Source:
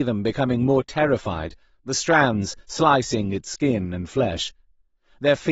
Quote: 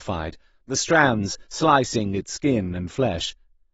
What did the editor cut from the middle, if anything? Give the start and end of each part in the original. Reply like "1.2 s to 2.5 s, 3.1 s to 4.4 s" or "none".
none